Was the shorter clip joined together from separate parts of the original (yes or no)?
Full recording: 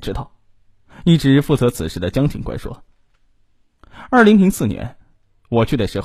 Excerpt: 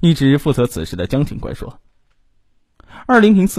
no